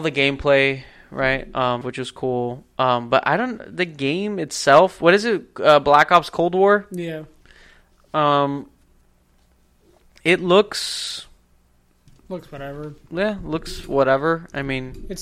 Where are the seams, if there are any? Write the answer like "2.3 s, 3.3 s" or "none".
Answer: 1.8 s